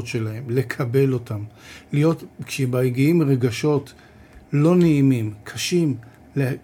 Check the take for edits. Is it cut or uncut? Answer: uncut